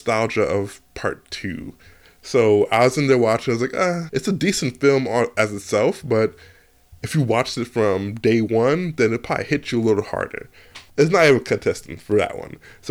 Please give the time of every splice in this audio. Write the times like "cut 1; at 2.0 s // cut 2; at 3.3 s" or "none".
cut 1; at 4.1 s // cut 2; at 10.9 s